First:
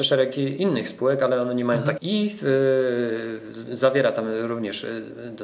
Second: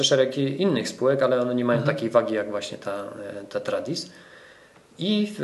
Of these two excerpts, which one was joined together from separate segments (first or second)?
first